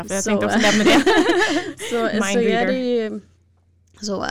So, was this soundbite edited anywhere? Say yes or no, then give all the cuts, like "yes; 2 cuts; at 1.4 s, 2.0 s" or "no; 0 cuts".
no; 0 cuts